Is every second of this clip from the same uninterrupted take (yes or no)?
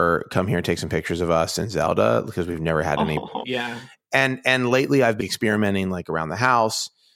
no